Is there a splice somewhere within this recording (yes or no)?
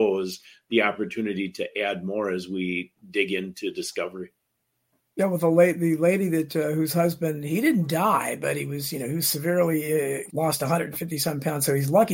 yes